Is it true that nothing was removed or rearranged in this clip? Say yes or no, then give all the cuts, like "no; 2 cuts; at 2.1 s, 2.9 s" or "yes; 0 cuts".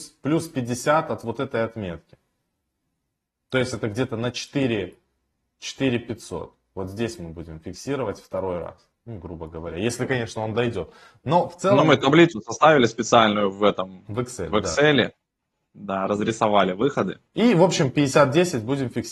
no; 1 cut; at 17.3 s